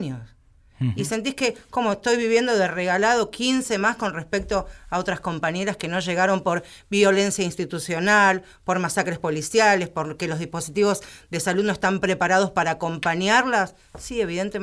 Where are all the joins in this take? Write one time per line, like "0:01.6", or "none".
none

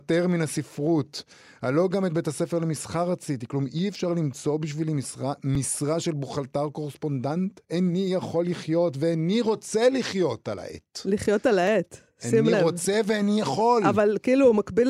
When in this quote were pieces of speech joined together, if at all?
none

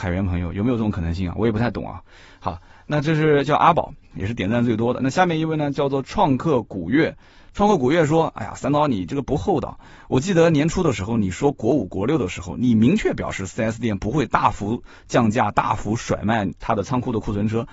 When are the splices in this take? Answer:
none

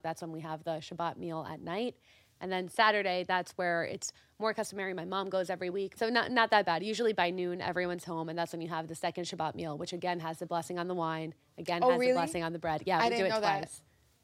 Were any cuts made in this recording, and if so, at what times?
0:06.0

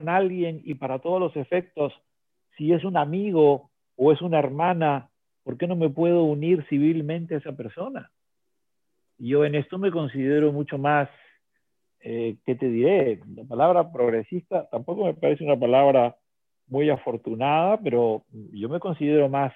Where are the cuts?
none

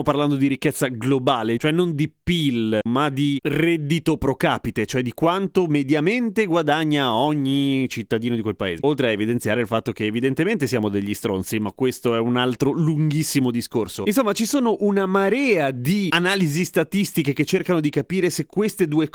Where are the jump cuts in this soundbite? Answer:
0:02.9
0:08.8

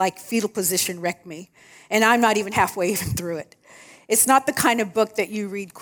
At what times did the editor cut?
none

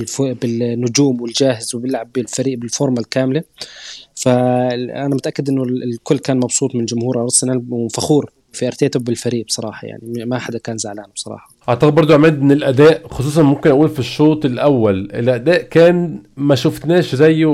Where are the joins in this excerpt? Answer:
0:08.5
0:11.6

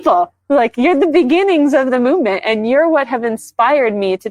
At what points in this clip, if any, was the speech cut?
none

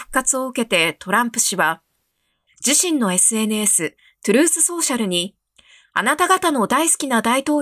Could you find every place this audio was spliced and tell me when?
none

